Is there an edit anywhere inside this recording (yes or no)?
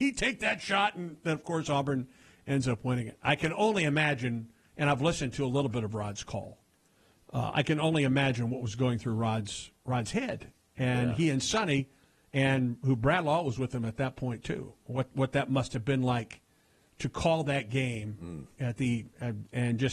no